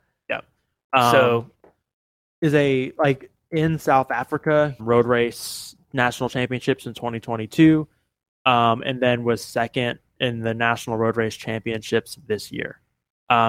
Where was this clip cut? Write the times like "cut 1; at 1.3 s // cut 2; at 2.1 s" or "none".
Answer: cut 1; at 4.8 s